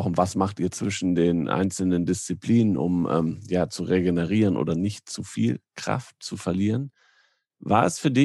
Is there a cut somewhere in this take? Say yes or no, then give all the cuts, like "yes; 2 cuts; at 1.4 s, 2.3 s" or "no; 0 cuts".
no; 0 cuts